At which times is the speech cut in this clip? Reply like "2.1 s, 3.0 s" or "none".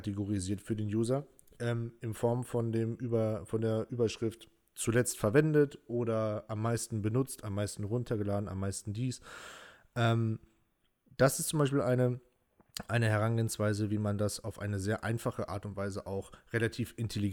none